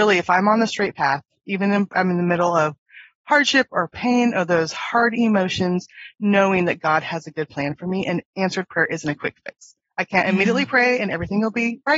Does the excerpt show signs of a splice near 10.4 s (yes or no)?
no